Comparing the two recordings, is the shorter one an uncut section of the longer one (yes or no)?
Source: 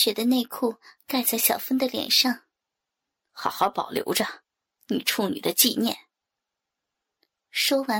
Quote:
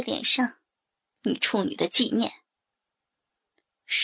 no